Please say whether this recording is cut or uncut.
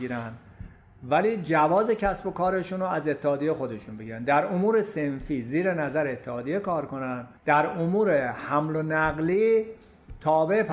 cut